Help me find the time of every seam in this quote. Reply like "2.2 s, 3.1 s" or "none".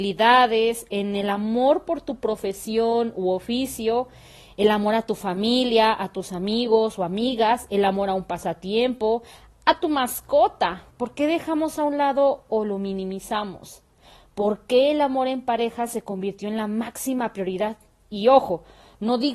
10.9 s